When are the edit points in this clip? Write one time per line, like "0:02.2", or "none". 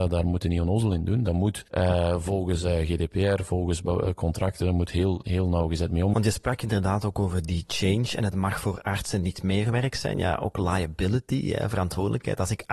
0:01.7
0:06.1